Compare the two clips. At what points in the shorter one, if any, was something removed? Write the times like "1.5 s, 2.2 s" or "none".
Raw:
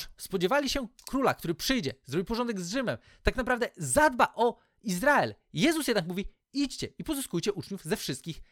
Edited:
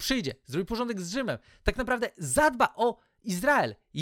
none